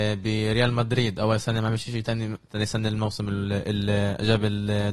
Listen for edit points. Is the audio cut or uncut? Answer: uncut